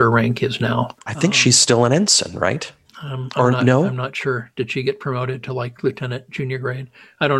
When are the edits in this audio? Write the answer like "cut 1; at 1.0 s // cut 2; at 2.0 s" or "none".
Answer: cut 1; at 1.0 s